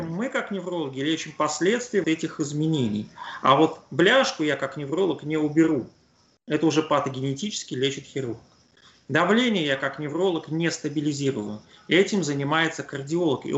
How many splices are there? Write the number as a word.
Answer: one